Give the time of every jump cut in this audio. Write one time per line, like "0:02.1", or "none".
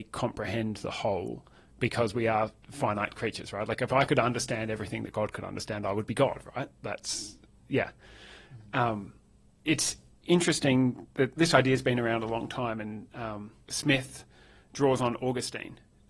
0:09.6
0:11.4
0:13.6